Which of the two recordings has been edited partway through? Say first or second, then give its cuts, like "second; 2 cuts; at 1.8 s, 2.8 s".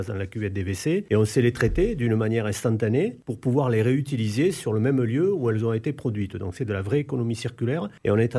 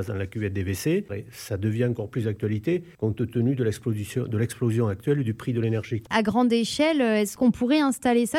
second; 1 cut; at 1.1 s